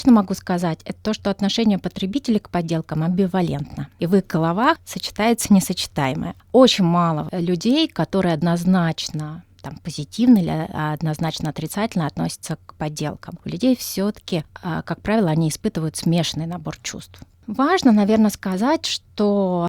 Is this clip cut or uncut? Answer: uncut